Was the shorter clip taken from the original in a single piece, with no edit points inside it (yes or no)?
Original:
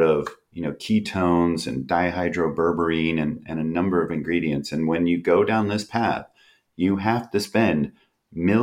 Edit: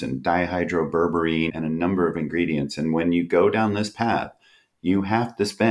no